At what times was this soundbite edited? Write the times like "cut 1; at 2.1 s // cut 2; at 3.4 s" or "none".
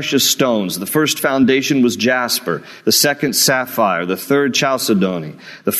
none